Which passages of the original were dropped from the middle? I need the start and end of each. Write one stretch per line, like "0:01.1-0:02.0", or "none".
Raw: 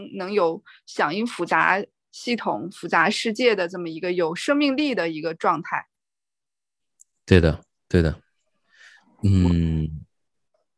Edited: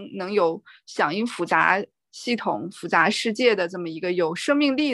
none